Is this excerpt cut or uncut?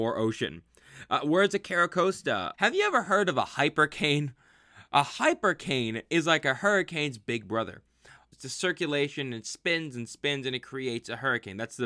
cut